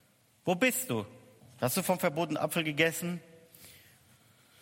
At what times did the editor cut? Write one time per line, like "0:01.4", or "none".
0:01.4